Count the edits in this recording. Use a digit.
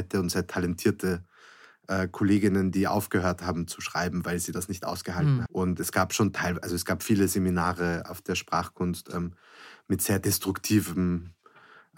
1